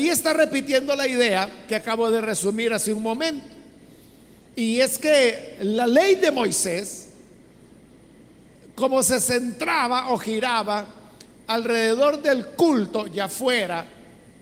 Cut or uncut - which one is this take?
uncut